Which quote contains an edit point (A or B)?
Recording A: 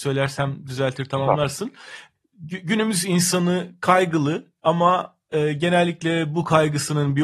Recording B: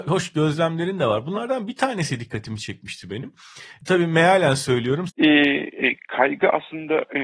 B